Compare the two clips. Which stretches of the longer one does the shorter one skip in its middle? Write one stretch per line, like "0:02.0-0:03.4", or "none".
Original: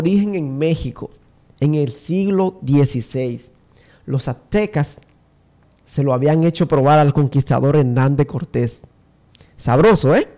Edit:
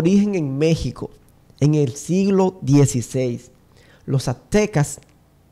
none

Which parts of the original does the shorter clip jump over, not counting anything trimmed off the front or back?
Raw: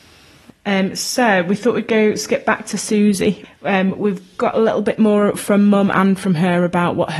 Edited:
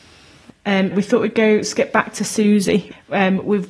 0:00.9-0:01.4

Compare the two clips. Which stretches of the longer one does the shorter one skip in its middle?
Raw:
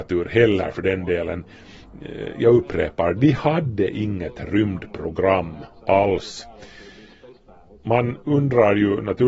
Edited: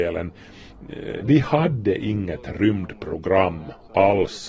0:02.3-0:03.1

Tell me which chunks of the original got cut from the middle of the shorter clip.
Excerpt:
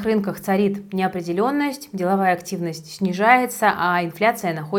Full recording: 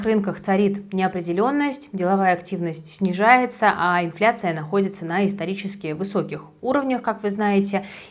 none

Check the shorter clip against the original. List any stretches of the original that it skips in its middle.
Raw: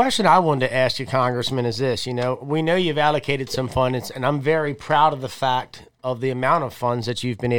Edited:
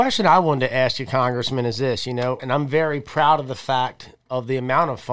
0:02.4-0:04.1

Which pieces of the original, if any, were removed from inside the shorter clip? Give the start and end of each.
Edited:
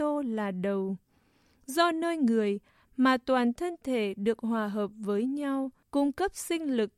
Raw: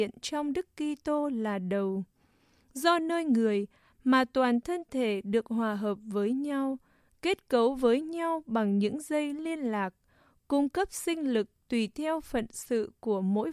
0:06.9-0:10.4

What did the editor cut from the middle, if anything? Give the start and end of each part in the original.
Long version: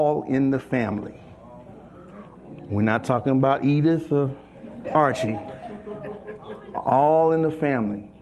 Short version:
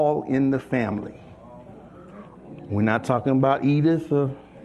none

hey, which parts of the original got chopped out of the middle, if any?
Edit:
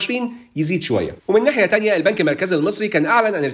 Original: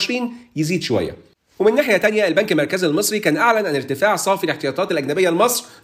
0:01.2-0:01.5

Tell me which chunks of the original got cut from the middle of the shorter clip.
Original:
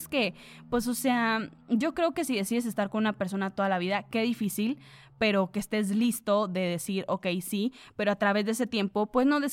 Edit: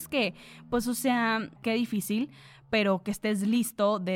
0:01.6-0:04.0

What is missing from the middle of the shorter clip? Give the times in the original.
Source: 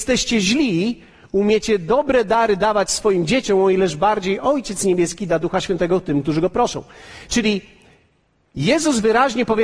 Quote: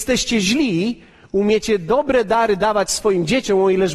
none

